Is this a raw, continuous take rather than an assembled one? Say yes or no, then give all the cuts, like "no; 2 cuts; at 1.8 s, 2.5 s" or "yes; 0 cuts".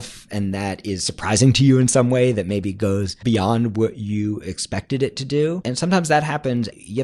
no; 1 cut; at 3.2 s